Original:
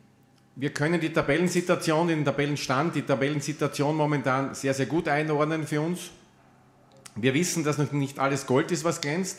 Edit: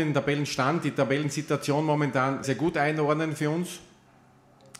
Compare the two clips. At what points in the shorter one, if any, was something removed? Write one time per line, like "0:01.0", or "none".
0:02.4